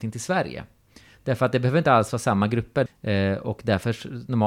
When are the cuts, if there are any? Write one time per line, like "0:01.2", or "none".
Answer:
0:02.9